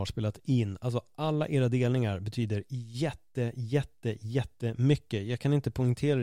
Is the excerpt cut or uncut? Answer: uncut